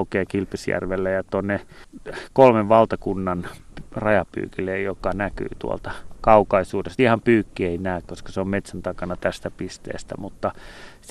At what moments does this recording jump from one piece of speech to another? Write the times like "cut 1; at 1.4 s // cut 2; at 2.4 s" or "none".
none